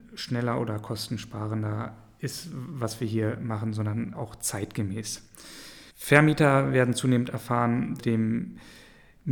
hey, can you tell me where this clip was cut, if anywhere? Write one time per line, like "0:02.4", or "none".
0:04.1
0:05.9
0:08.0